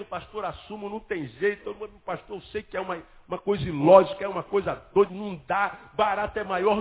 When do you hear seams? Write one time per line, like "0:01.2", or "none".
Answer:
0:05.1